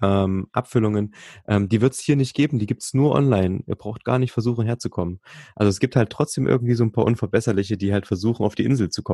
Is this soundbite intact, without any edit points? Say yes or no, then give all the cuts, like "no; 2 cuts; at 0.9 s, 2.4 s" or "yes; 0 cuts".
yes; 0 cuts